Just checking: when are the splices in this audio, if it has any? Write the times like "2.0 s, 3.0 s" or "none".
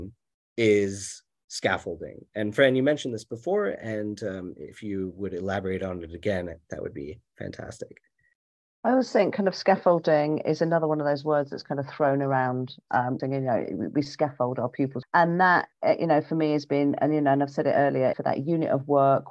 13.2 s, 15.0 s, 18.1 s